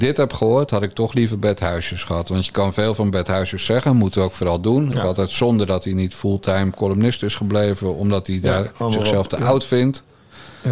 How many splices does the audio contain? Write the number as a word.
one